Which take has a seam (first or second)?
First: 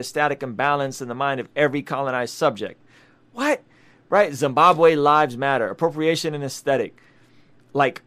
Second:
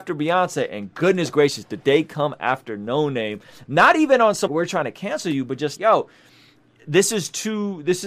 second